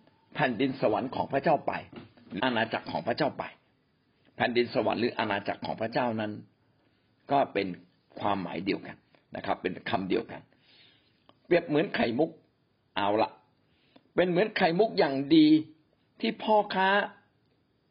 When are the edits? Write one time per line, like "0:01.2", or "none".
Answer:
0:02.4